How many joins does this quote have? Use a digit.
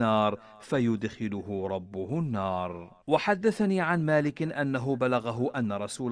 1